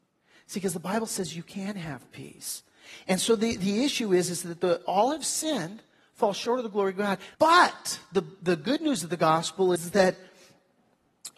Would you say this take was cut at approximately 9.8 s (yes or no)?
yes